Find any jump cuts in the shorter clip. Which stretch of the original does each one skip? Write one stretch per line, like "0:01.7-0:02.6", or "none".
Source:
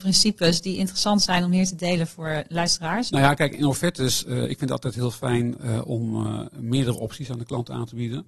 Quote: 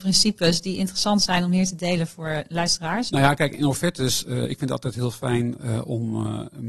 none

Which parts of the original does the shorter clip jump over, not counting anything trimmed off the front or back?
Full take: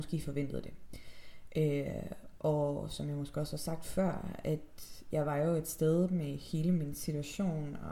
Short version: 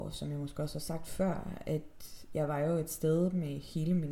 none

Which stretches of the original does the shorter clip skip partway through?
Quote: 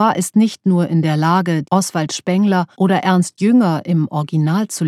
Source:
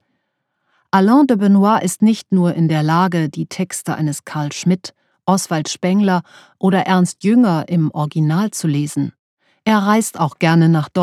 0:03.3-0:05.2
0:06.3-0:06.6

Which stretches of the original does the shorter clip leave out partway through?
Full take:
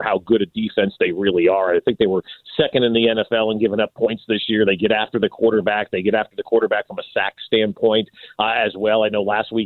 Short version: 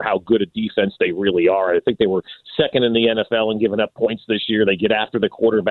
none

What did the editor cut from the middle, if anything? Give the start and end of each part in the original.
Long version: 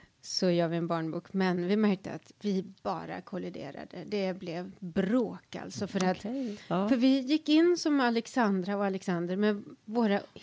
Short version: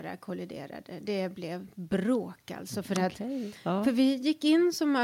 none

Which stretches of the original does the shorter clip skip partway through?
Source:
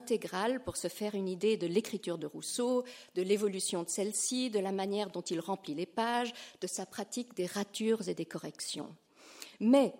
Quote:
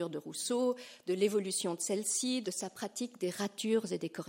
0:04.5-0:06.6

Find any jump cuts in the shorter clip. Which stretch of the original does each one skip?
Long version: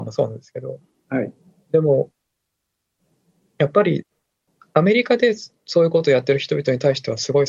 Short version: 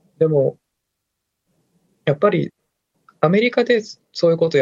none

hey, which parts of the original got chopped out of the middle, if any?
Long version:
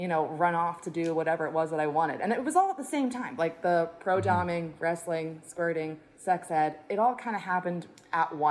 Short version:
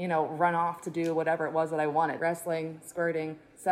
0:02.2-0:04.8

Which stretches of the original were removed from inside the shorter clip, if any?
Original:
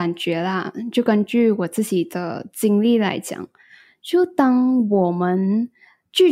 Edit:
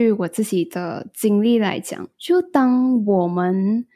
0:03.5-0:04.0

